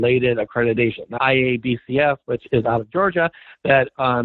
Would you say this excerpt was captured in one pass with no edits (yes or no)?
no